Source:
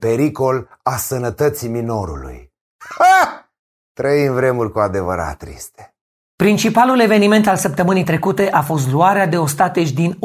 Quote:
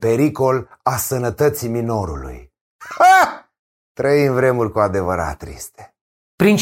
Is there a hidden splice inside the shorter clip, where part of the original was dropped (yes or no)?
no